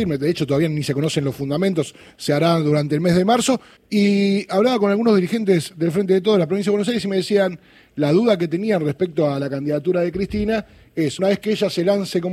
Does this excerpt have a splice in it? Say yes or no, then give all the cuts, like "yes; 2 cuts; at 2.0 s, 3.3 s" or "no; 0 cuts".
yes; 2 cuts; at 3.8 s, 11.2 s